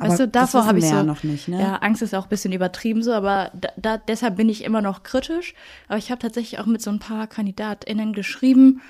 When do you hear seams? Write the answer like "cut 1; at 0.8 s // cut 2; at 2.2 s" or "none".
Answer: none